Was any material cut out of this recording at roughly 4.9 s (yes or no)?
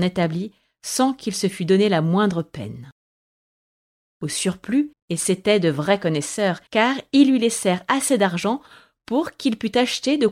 yes